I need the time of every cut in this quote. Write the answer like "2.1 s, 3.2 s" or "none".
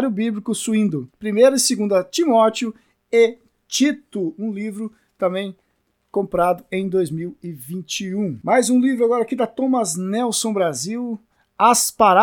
1.1 s

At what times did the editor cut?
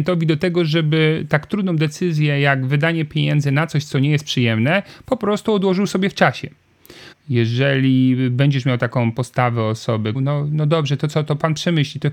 7.1 s, 10.1 s

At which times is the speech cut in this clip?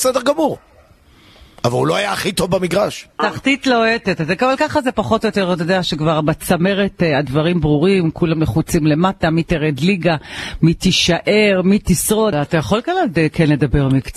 3.2 s, 12.3 s

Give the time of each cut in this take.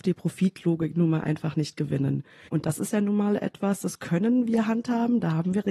2.5 s

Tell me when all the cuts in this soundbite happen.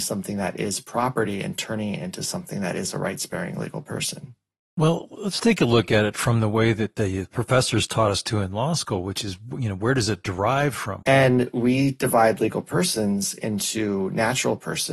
11.0 s

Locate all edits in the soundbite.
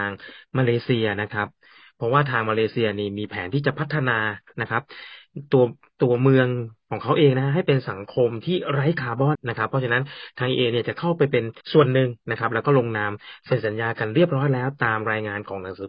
9.3 s, 11.6 s

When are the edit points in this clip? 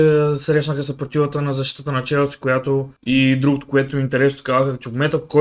3.0 s

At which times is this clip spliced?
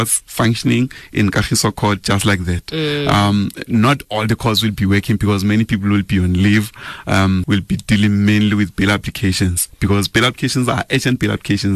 7.4 s

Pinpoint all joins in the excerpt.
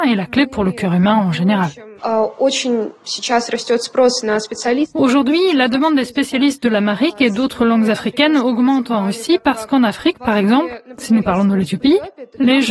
2.0 s

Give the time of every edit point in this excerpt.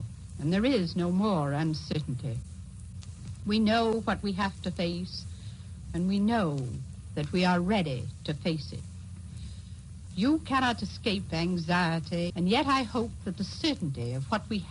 10.1 s, 12.3 s

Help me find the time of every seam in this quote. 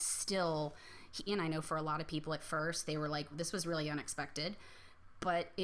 1.3 s, 3.3 s

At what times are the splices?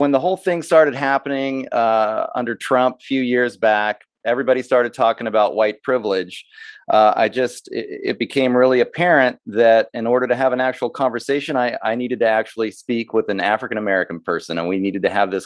none

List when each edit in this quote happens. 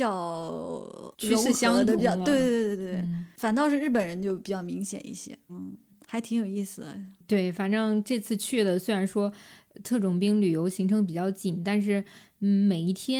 5.5 s

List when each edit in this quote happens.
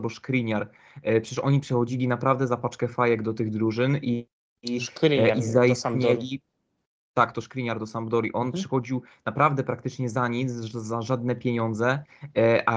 none

